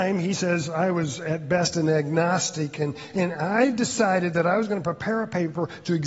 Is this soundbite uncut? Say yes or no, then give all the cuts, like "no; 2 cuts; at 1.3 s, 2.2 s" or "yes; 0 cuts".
yes; 0 cuts